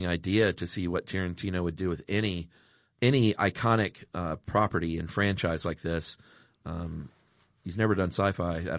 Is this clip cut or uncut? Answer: uncut